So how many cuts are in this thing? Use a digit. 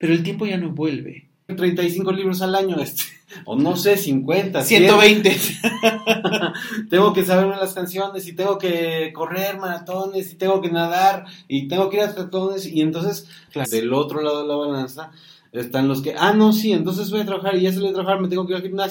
2